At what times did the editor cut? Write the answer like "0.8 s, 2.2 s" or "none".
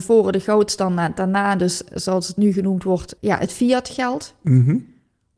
3.2 s